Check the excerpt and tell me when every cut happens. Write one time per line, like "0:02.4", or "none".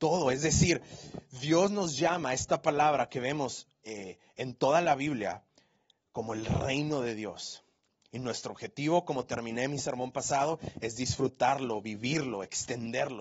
none